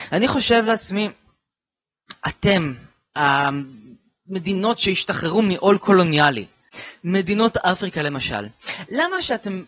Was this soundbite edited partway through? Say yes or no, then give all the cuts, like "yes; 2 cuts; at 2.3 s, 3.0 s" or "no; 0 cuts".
no; 0 cuts